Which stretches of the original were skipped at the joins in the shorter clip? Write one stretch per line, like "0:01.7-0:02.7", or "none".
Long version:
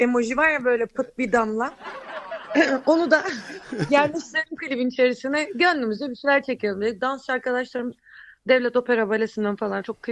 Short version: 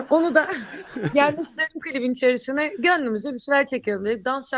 none